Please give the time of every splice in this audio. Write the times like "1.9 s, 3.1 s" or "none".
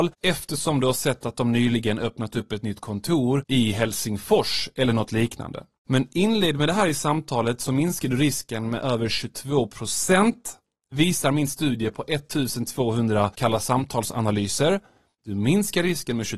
none